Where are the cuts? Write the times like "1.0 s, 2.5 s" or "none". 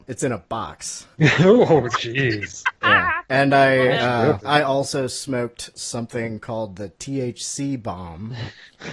4.4 s